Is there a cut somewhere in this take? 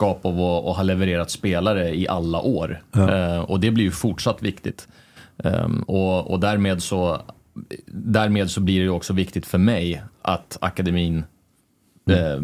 no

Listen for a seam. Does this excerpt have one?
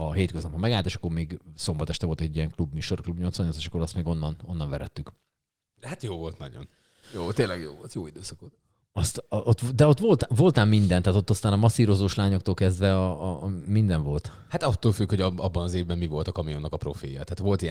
no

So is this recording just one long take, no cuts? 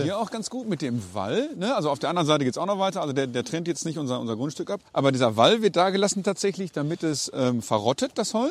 no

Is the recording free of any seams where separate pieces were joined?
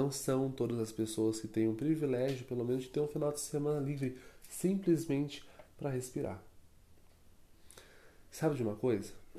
yes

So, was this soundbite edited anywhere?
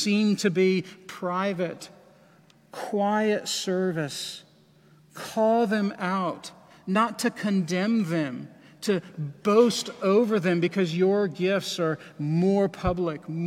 no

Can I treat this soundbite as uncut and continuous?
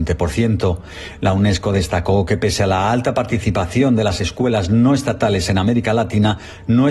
yes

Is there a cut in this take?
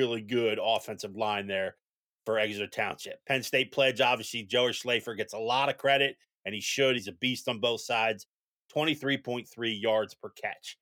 no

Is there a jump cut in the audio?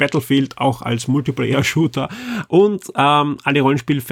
no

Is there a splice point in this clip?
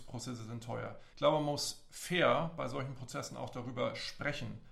yes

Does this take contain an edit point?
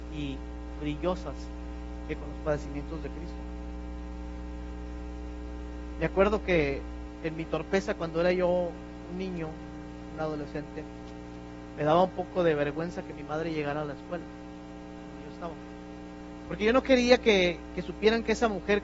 yes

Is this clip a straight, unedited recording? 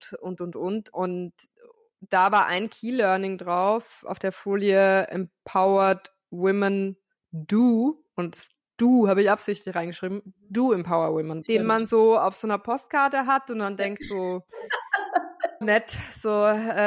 no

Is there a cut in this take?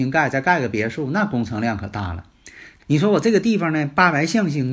yes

